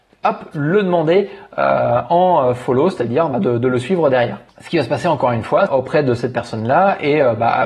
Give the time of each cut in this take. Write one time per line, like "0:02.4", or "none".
0:04.5
0:05.7